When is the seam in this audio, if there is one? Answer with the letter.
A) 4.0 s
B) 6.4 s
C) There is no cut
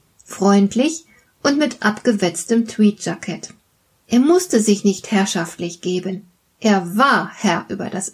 C